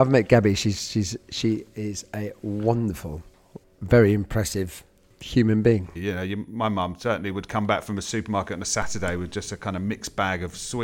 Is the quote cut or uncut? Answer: cut